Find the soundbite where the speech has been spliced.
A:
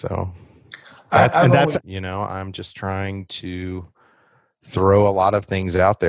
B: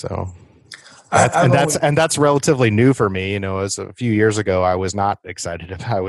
A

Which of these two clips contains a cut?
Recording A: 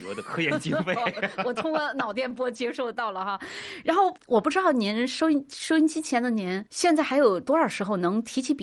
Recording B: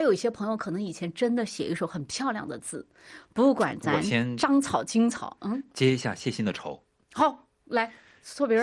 A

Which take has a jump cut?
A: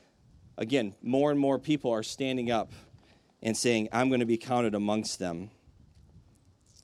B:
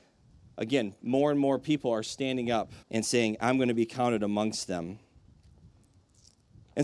B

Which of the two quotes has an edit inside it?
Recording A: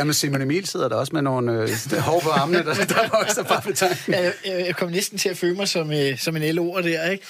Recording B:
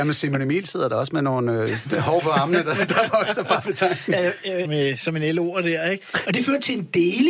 B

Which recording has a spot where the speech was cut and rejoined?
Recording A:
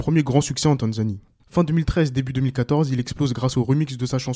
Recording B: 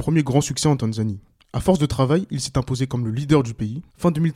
A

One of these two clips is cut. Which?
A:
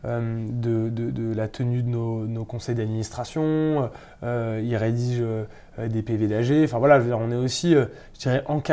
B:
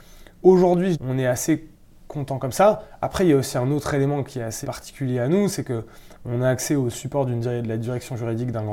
B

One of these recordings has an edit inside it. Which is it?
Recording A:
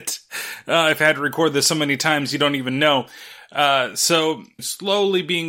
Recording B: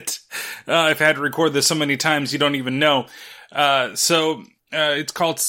A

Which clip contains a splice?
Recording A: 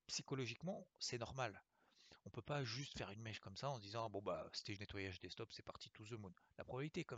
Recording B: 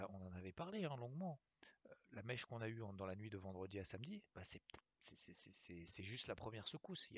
A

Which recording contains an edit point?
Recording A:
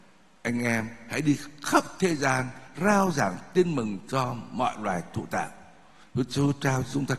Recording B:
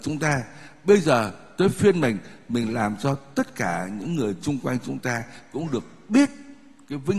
A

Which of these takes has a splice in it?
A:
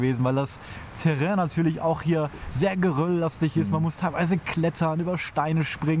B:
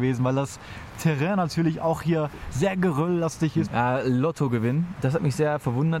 B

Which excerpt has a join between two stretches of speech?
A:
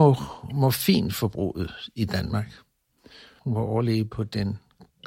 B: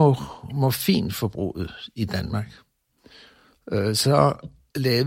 A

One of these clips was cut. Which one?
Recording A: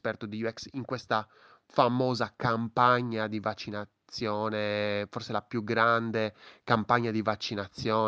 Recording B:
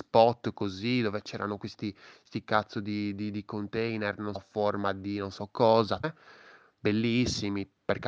B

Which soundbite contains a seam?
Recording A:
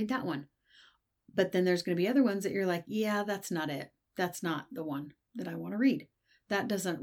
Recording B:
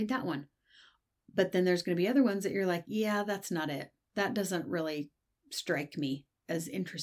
B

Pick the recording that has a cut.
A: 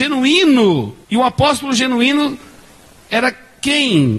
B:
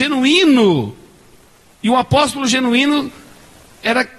A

